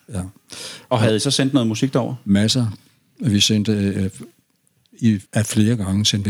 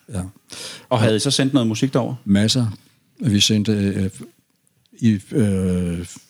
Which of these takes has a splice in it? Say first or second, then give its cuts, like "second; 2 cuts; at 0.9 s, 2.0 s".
first; 1 cut; at 5.2 s